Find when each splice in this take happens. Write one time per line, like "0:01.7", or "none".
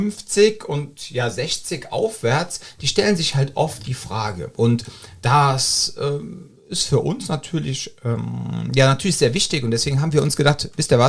none